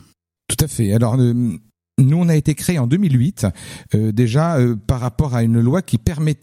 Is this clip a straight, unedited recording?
yes; 0 cuts

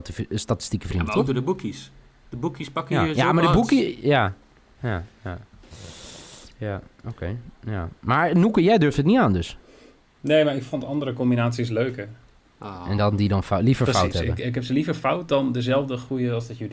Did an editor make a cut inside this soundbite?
yes; 1 cut; at 12.4 s

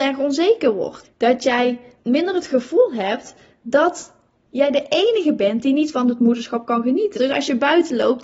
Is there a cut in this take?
yes; 2 cuts; at 1.0 s, 7.1 s

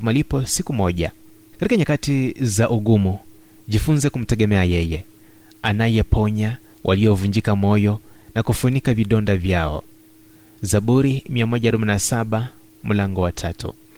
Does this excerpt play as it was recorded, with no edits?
yes; 0 cuts

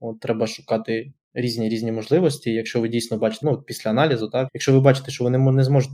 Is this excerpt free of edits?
no; 2 cuts; at 3.4 s, 4.5 s

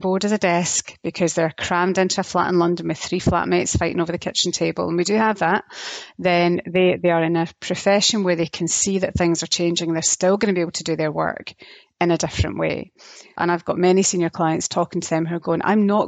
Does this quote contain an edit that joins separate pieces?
yes; 1 cut; at 13.4 s

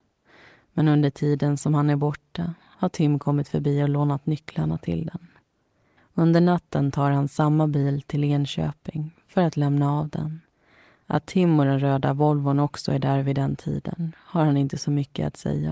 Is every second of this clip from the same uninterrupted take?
no; 1 cut; at 6.0 s

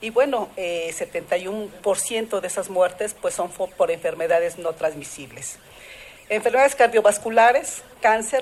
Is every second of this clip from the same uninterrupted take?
yes; 0 cuts

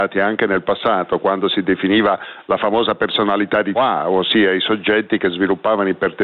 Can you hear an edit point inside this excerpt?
yes; 1 cut; at 3.7 s

